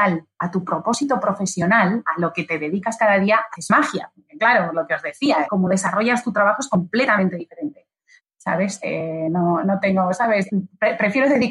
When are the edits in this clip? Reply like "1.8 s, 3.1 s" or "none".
5.5 s, 8.2 s